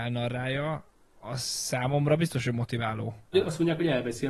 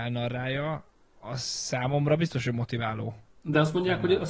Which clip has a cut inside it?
first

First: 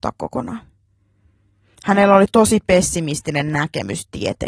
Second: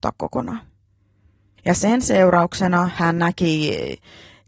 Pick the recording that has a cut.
second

